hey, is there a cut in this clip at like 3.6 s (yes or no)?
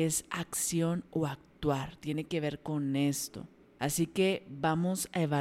yes